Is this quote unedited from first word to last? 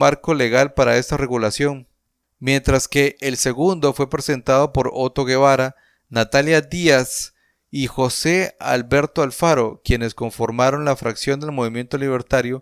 yes; 0 cuts

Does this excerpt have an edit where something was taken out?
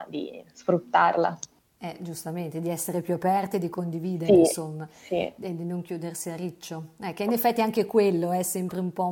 no; 0 cuts

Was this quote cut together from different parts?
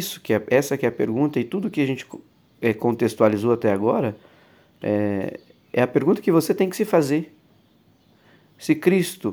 no; 0 cuts

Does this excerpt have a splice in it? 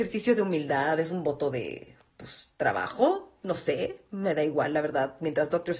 no; 0 cuts

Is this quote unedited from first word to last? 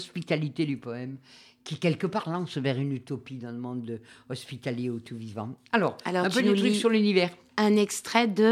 yes; 0 cuts

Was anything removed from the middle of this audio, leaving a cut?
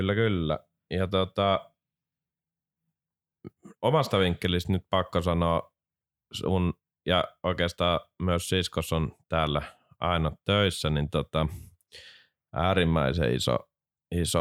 no; 0 cuts

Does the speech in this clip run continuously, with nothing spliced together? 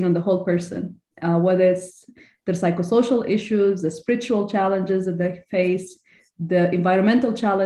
yes; 0 cuts

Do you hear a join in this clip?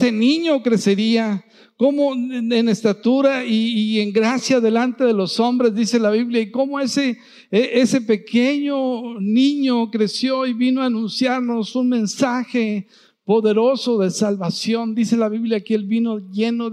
no; 0 cuts

